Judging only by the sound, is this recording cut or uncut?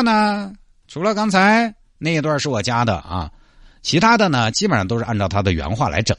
uncut